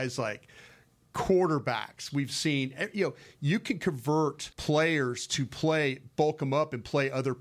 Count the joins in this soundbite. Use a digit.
2